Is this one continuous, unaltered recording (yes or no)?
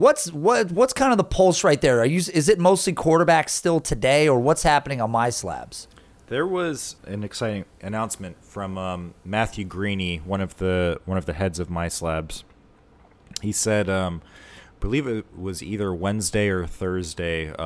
yes